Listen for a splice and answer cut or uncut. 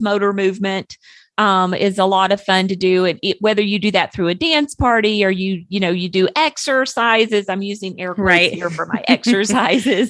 uncut